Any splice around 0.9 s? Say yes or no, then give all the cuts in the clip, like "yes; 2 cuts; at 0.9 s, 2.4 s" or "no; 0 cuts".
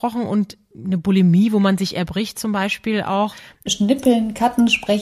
no; 1 cut; at 3.7 s